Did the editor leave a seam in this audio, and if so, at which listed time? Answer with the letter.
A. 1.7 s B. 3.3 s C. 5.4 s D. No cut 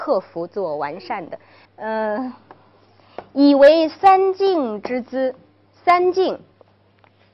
A